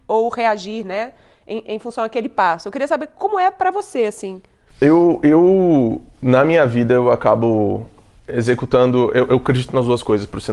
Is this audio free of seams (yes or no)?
yes